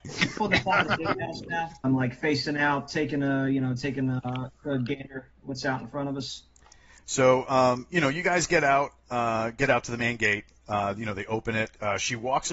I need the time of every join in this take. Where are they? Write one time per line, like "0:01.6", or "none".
0:01.8